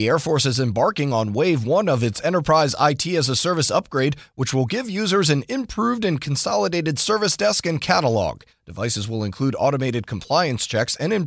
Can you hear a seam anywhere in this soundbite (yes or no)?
yes